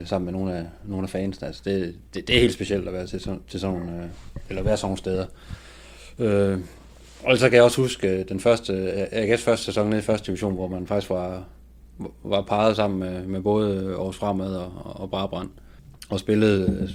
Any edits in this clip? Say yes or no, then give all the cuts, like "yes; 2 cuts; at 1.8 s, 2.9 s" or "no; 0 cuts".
no; 0 cuts